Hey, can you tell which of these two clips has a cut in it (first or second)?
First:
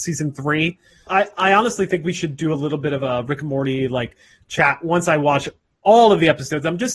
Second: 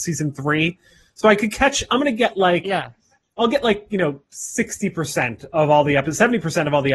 first